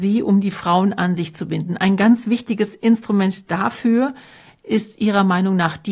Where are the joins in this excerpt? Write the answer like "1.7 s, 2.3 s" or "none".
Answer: none